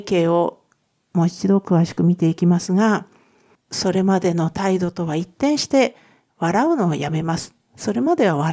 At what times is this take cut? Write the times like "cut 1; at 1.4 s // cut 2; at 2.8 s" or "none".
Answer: cut 1; at 3.6 s